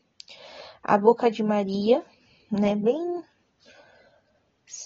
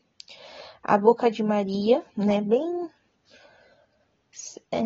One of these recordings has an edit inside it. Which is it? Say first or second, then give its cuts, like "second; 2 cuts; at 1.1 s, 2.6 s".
second; 1 cut; at 2.1 s